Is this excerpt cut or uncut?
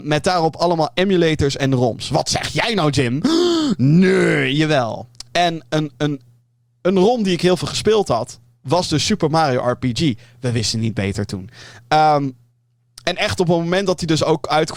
uncut